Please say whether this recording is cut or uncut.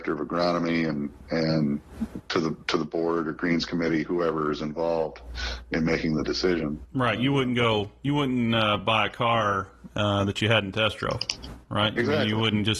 uncut